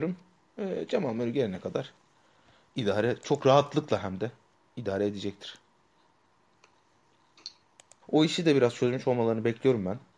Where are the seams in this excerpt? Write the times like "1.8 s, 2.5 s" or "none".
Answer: 8.0 s

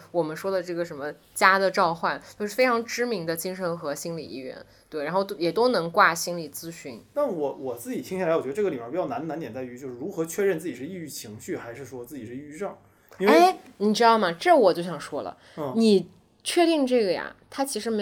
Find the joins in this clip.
none

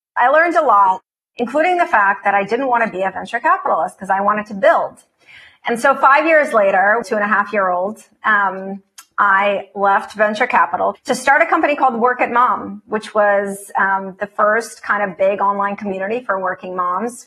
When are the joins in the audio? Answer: 7.0 s

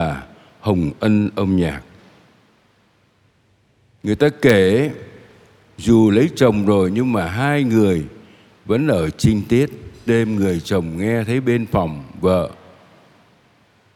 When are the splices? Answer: 10.1 s

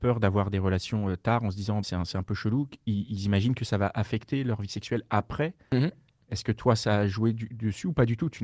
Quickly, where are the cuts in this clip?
1.8 s

